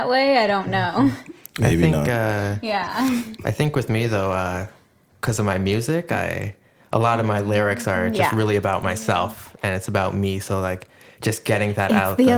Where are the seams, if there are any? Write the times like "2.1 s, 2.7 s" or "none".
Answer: none